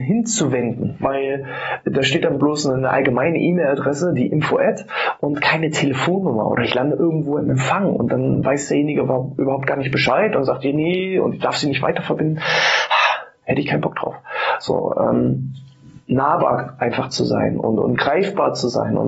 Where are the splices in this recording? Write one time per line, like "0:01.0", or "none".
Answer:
0:13.4